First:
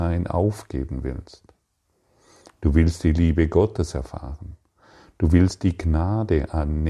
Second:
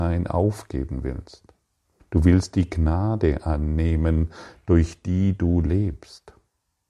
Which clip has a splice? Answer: second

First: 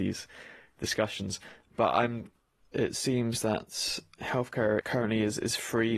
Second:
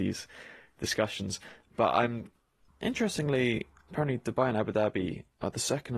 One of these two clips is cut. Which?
second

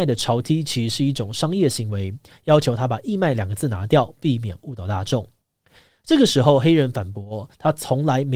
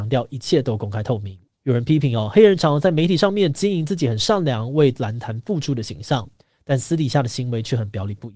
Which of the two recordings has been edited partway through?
second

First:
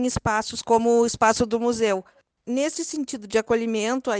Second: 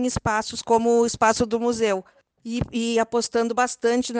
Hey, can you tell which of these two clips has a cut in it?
first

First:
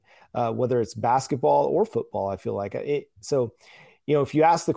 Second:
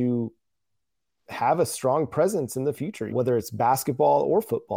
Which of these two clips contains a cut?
second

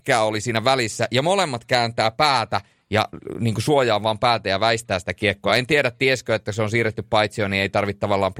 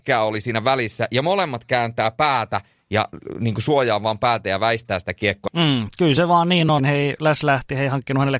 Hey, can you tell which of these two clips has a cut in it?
second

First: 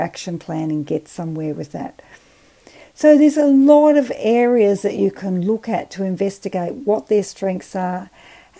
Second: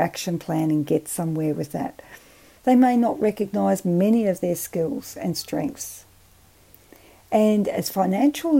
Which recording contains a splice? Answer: second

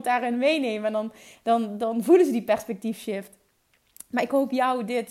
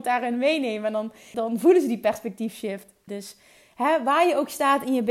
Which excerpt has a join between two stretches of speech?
second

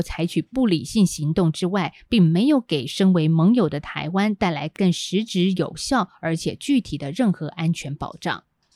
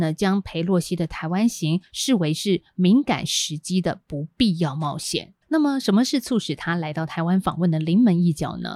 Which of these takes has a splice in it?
second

